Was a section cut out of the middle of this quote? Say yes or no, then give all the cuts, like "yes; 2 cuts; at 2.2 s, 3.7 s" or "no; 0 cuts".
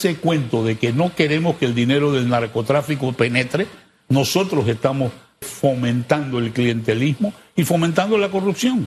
yes; 1 cut; at 5.4 s